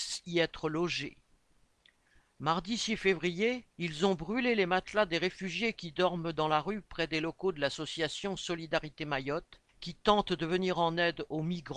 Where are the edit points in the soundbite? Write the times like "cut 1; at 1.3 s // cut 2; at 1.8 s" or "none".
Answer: cut 1; at 3.7 s // cut 2; at 9.7 s

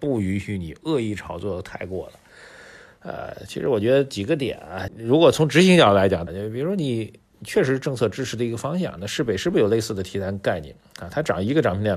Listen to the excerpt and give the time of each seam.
cut 1; at 4.9 s // cut 2; at 6.3 s

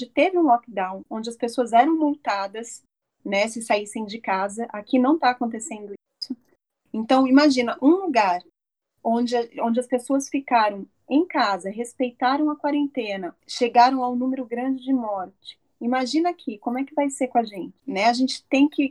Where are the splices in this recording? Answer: none

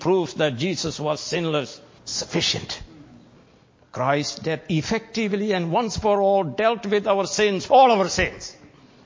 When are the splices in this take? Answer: cut 1; at 2.0 s // cut 2; at 7.7 s

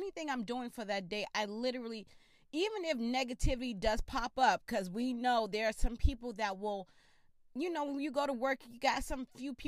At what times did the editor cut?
none

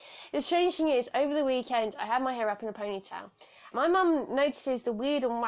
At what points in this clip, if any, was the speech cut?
cut 1; at 3.7 s

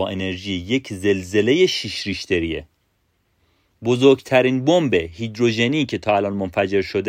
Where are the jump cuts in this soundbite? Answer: none

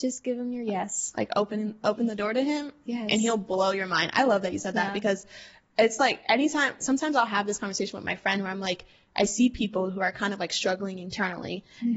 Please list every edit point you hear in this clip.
none

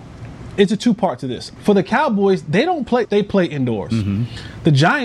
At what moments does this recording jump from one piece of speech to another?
cut 1; at 1.6 s // cut 2; at 3.0 s

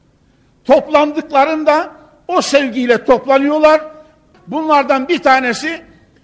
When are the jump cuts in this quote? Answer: cut 1; at 4.3 s

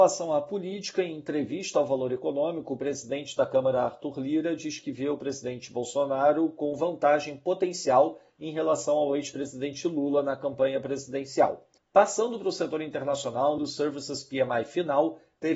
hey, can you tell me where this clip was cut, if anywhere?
cut 1; at 11.8 s // cut 2; at 13.6 s

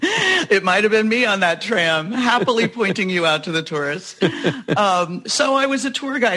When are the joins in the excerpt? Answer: none

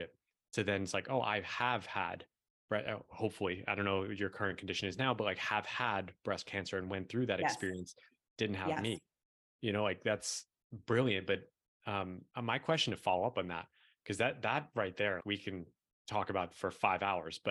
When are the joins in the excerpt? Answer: cut 1; at 12.3 s // cut 2; at 15.2 s

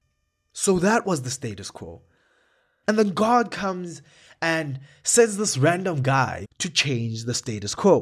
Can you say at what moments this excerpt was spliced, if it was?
cut 1; at 2.8 s // cut 2; at 6.4 s

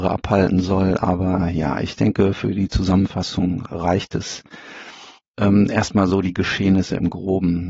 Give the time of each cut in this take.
none

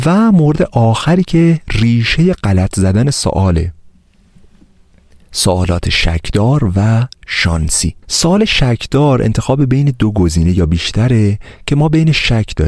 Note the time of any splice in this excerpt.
cut 1; at 8.0 s

